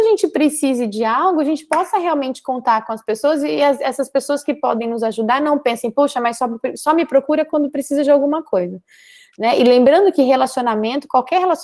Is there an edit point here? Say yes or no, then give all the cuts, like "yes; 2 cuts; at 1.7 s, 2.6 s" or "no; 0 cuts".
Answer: no; 0 cuts